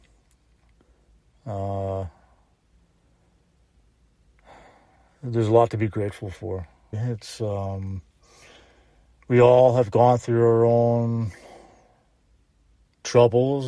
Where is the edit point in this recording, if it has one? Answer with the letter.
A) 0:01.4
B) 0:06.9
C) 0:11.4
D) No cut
B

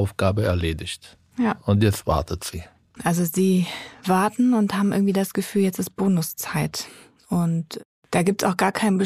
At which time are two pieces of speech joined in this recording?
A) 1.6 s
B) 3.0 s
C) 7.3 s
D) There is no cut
B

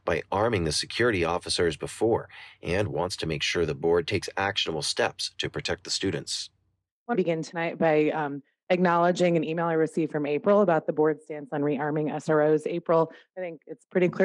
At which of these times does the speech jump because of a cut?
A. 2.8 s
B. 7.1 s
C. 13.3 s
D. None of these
B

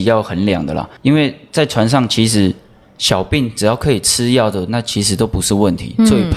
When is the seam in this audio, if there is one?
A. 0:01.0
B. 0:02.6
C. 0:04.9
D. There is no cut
A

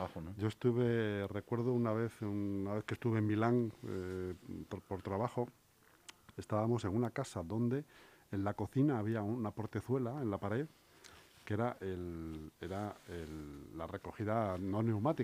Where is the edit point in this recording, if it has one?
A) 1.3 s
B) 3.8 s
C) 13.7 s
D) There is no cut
D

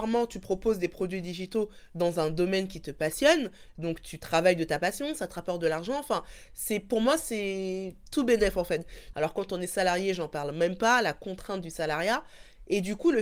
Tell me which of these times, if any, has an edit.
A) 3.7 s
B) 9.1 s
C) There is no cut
B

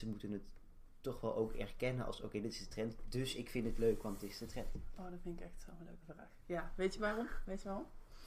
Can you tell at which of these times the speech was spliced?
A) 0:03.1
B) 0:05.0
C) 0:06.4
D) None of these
D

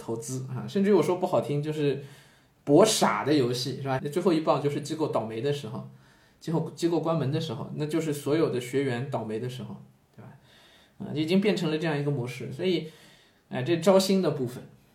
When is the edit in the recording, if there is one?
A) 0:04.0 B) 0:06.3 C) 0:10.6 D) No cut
A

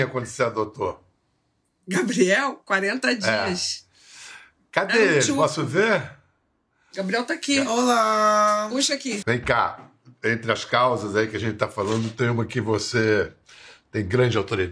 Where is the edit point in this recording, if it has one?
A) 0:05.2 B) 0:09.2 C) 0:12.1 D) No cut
B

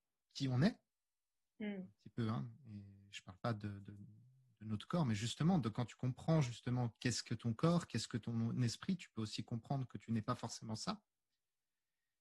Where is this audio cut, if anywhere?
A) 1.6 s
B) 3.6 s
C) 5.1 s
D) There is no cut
D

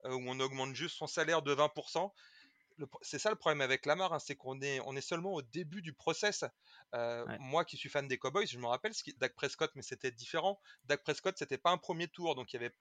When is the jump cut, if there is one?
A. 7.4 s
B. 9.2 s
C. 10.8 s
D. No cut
B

